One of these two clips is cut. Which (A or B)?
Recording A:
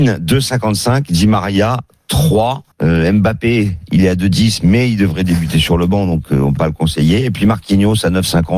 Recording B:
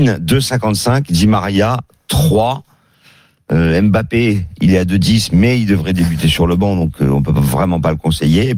A